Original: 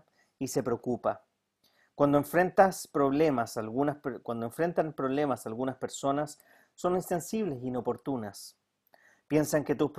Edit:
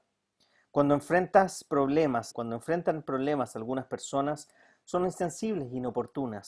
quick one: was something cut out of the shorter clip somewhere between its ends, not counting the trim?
yes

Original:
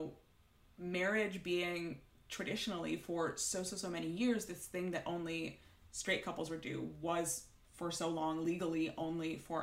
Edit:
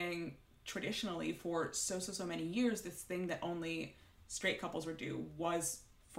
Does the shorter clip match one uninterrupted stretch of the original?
yes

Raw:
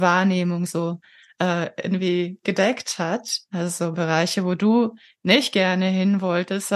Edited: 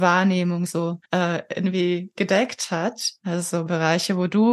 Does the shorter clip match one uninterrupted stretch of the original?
no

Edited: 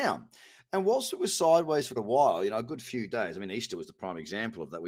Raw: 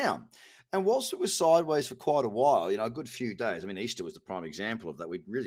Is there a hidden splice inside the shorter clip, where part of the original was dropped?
yes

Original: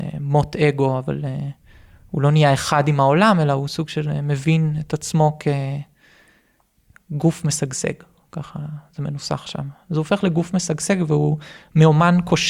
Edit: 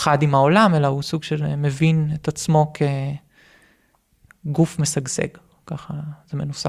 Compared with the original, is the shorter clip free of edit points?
yes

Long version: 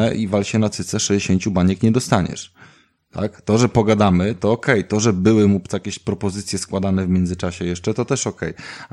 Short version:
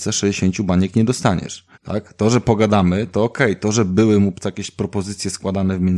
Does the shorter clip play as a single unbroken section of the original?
no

